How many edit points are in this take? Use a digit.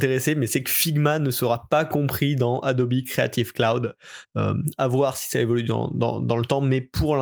1